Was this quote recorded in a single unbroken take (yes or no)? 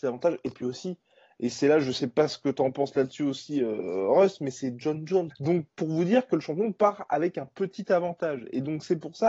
no